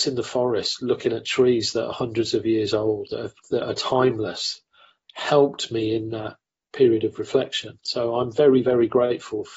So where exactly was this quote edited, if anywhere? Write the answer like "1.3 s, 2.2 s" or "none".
none